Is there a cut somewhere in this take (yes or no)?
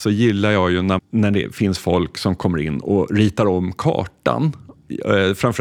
yes